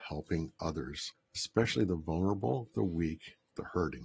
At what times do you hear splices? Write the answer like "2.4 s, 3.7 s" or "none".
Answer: 1.1 s